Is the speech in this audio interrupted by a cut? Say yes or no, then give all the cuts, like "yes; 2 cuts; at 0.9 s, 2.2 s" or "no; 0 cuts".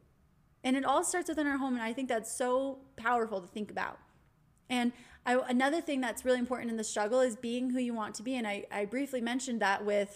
no; 0 cuts